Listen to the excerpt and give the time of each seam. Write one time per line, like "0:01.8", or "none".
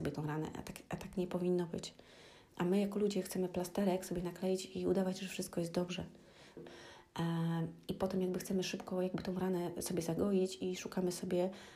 0:02.5
0:06.6